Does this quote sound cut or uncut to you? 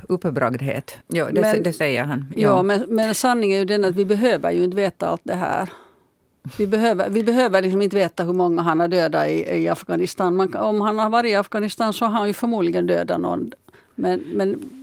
cut